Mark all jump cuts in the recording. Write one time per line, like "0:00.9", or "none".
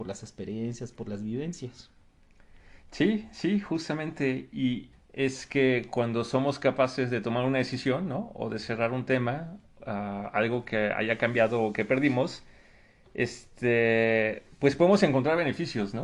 0:04.9